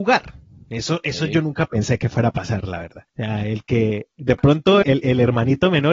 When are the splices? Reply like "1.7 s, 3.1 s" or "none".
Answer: 3.1 s, 4.8 s

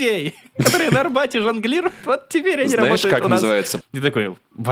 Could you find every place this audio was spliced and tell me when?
3.8 s

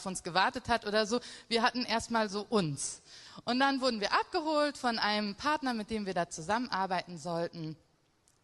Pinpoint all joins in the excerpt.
none

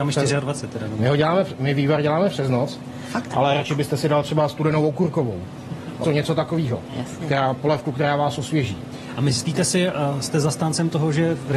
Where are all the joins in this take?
3.3 s, 6.0 s

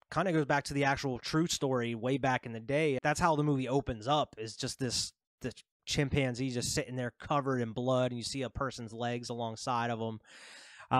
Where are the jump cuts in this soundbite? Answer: 3.0 s, 5.8 s

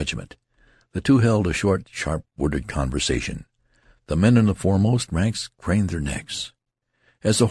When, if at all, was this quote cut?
none

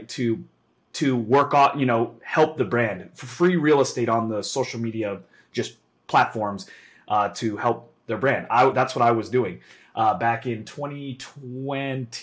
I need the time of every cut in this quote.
none

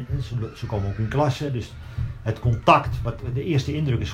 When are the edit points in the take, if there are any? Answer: none

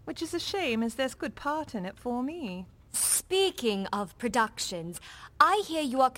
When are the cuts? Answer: 1.2 s

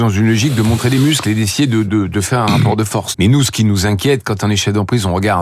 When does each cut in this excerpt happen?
3.1 s

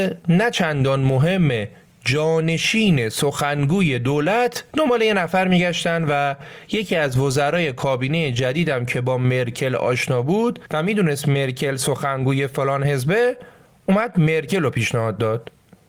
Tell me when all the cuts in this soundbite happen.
4.7 s

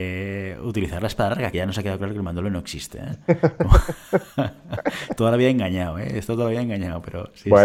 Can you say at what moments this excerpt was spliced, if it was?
1.5 s

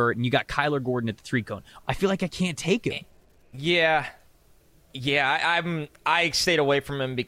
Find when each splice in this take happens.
1.8 s

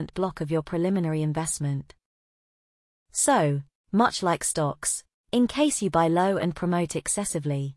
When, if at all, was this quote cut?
none

